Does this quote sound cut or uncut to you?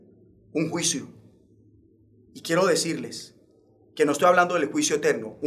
uncut